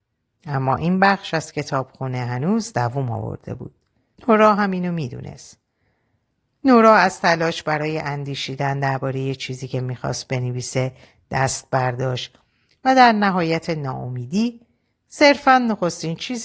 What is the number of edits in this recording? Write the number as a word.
one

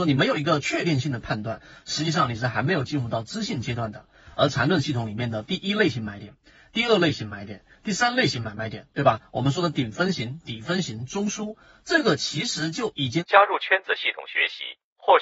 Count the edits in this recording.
zero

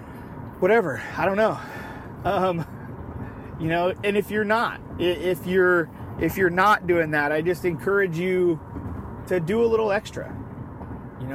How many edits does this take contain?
one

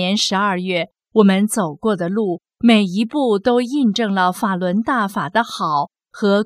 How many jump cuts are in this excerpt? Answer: one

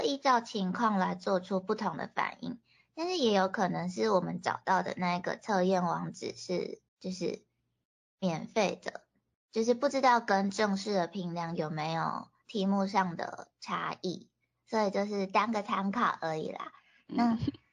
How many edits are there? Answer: one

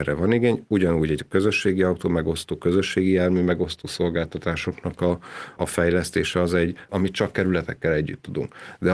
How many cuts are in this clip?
two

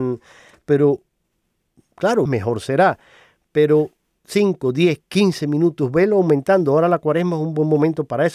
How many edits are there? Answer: one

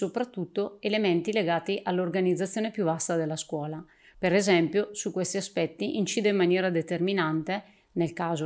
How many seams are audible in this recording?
one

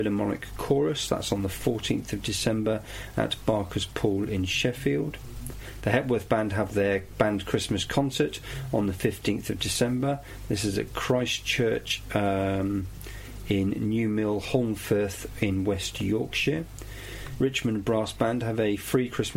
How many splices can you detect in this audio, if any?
one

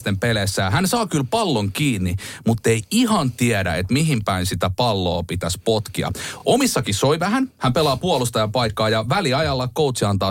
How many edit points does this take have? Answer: zero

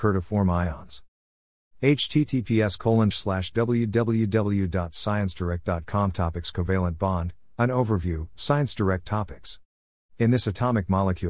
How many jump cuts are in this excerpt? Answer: two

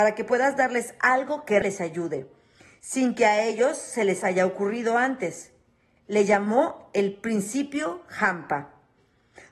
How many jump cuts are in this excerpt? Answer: one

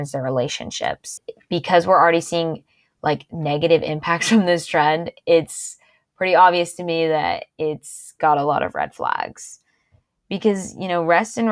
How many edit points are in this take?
zero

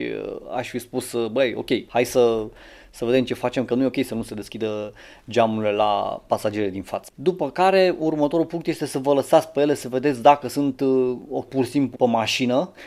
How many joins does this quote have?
two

